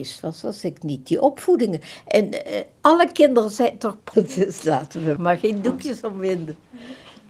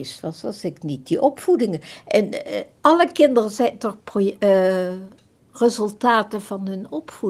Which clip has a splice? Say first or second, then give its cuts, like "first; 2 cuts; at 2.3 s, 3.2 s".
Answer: first; 2 cuts; at 4.1 s, 5.2 s